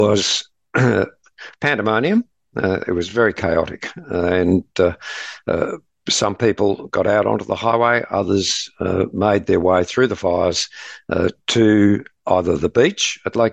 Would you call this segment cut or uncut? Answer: uncut